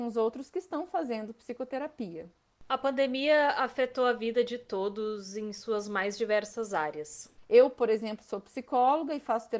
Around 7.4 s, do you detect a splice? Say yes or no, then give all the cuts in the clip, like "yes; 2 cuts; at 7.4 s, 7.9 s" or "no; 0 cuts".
yes; 1 cut; at 7.4 s